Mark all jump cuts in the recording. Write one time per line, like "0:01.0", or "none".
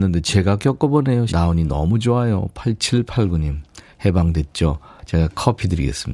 0:01.3